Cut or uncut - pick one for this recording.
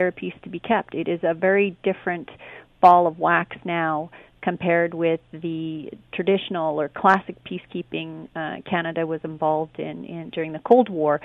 uncut